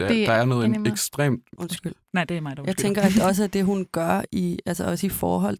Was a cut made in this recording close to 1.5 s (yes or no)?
yes